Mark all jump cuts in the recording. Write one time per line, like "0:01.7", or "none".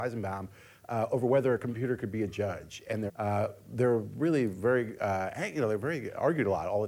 0:03.1